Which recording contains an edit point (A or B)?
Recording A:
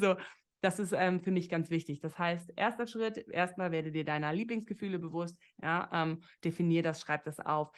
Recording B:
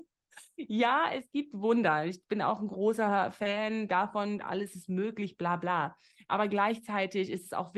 A